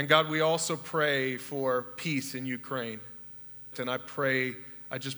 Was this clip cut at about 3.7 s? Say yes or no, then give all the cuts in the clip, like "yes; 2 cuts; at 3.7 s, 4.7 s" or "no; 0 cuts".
yes; 1 cut; at 3.7 s